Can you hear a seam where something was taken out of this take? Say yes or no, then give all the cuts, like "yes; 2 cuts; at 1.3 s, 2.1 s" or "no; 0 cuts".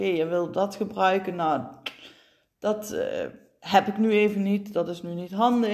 no; 0 cuts